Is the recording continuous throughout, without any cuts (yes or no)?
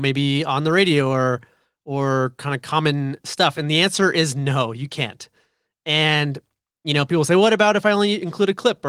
yes